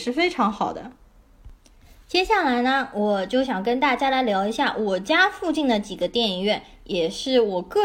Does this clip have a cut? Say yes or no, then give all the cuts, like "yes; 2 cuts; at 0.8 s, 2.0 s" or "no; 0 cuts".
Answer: no; 0 cuts